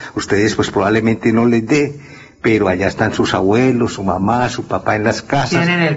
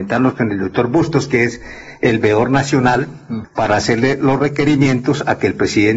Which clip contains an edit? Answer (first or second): second